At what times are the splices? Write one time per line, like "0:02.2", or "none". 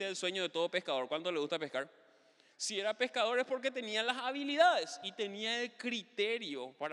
0:02.5